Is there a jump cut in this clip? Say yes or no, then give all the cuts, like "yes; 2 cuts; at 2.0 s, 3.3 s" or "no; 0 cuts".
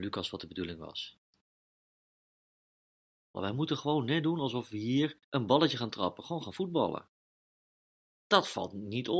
yes; 2 cuts; at 3.3 s, 5.2 s